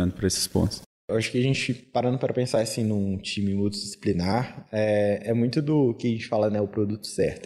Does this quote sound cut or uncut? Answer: uncut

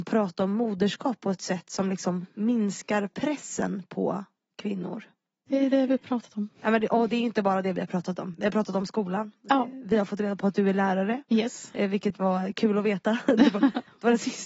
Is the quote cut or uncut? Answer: cut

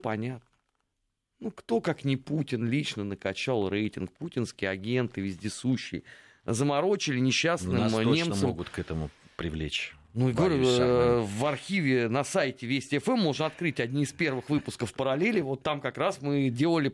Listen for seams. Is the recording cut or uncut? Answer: uncut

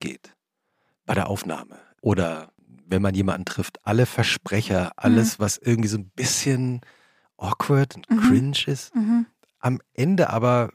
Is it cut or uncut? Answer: uncut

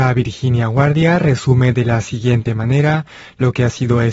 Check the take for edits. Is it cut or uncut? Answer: uncut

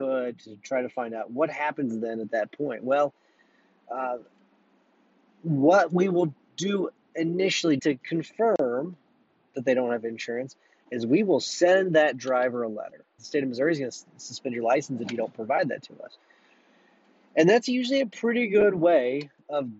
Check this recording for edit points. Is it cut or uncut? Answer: cut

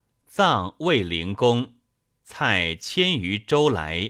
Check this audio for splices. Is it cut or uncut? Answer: cut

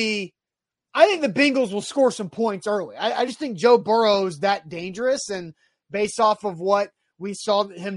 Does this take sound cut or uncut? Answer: uncut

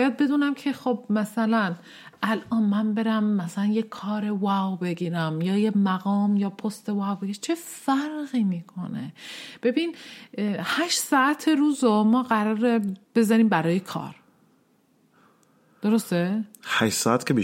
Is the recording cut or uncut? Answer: cut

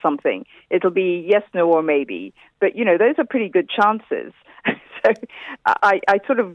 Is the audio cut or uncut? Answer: uncut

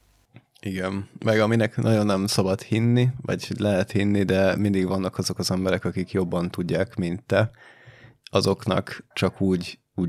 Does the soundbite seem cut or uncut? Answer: cut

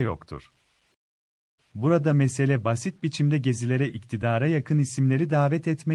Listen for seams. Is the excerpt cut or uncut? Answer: cut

